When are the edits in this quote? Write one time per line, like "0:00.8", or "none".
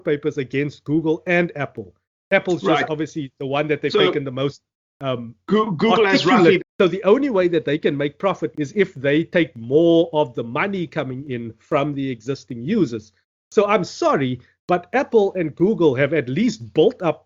0:06.6
0:08.5